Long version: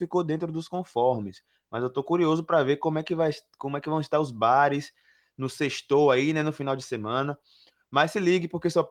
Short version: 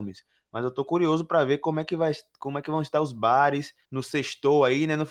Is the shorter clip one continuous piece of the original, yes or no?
no